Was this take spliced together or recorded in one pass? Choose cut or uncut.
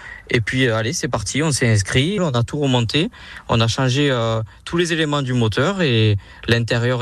cut